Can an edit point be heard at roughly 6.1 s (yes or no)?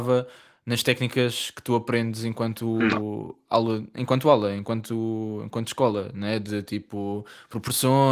no